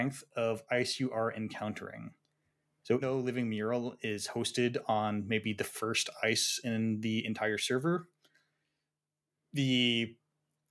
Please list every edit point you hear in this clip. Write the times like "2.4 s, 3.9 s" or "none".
3.0 s